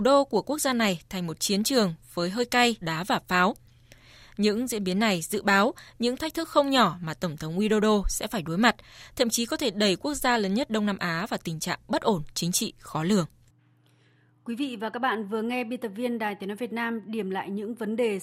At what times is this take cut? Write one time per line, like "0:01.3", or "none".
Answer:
0:02.8

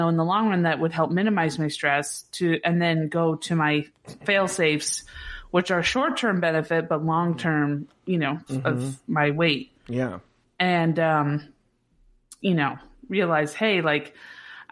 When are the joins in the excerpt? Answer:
0:08.5
0:12.4

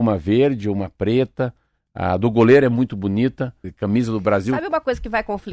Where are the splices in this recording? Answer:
0:03.6

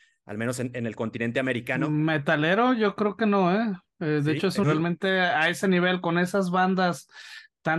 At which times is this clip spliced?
0:04.6

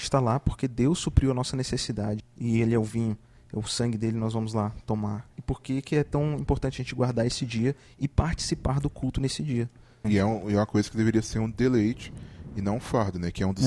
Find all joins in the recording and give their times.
0:02.2
0:05.3
0:10.0

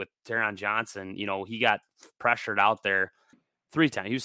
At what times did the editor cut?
0:03.3

